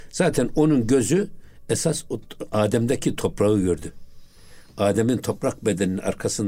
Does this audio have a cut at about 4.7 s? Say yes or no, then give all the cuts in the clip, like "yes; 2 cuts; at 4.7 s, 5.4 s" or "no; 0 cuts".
no; 0 cuts